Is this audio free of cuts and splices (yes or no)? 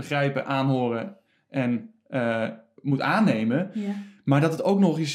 yes